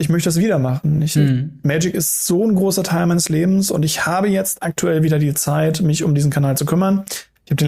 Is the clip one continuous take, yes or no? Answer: yes